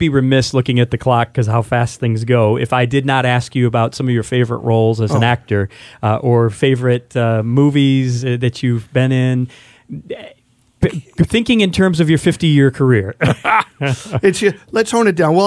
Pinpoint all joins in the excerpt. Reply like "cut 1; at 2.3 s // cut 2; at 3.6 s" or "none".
none